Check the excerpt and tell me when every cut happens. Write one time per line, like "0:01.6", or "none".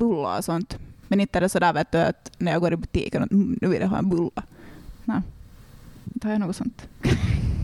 none